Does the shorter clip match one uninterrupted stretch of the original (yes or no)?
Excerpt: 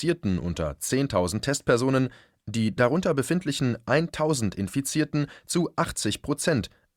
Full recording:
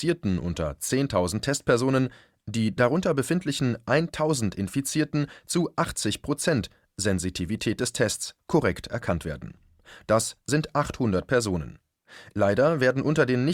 yes